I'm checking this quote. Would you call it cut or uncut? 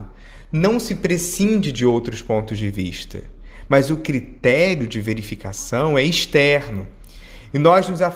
uncut